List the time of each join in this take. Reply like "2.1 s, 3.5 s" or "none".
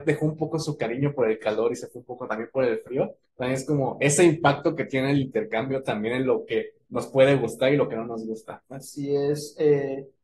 none